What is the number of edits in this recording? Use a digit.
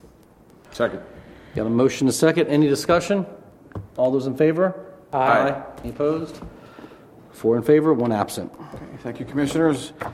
0